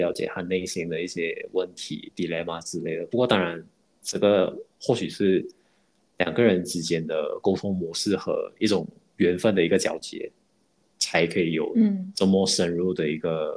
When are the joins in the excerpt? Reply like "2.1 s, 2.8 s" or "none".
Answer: none

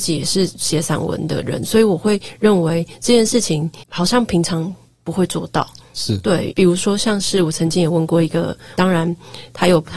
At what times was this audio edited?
6.5 s, 8.7 s

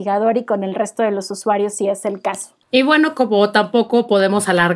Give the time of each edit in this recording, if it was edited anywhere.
2.6 s

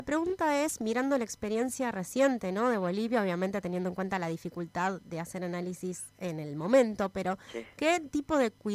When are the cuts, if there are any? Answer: none

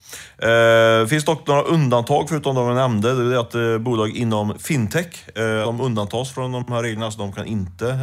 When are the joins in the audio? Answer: 5.6 s

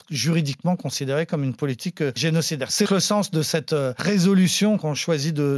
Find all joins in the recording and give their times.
2.8 s

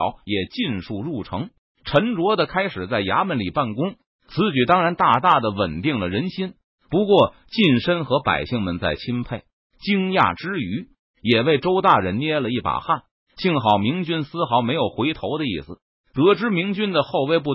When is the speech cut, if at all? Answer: none

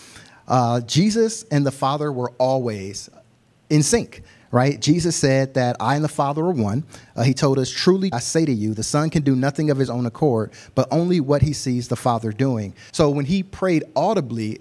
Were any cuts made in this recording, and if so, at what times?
8.1 s, 12.9 s

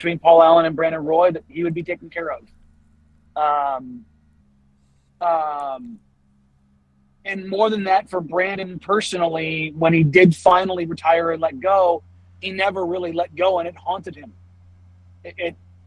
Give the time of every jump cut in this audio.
4.4 s

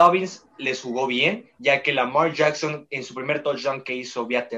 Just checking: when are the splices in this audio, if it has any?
1.6 s

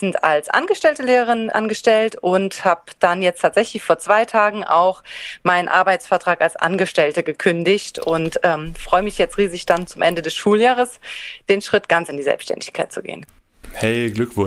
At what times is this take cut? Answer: none

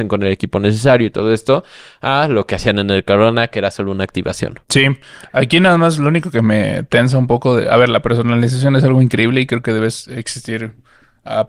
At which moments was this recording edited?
4.6 s

